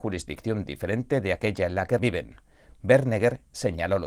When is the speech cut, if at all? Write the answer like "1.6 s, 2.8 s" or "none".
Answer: 2.0 s